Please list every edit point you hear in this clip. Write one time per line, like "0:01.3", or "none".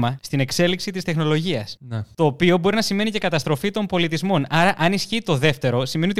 none